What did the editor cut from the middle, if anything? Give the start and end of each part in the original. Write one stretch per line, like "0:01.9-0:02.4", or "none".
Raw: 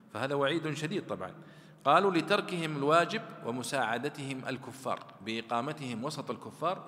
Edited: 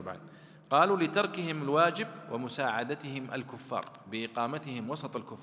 none

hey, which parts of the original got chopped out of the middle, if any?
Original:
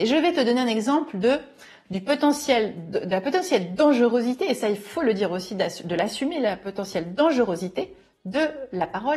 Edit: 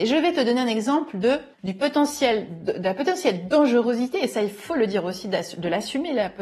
0:01.5-0:01.8

